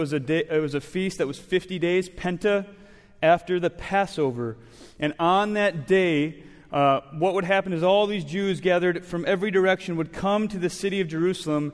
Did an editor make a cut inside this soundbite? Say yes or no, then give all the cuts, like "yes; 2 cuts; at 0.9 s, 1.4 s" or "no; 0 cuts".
no; 0 cuts